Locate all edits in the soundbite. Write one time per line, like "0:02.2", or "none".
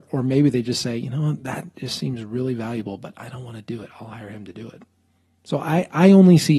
none